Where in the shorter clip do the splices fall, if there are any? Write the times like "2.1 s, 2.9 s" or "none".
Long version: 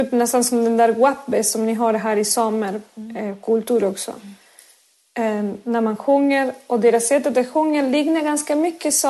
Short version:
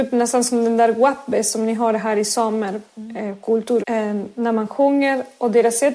3.8 s